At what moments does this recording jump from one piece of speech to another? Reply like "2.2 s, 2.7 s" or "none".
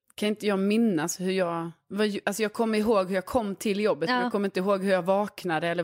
2.2 s

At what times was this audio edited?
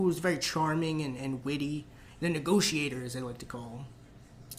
none

